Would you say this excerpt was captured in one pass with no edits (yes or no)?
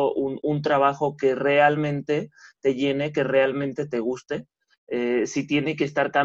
yes